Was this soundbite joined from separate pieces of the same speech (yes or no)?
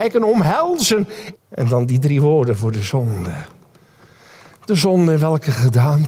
yes